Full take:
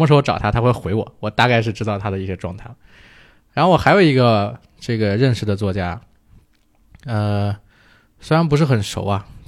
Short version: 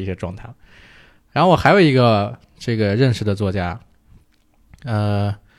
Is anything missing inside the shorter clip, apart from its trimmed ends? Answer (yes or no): no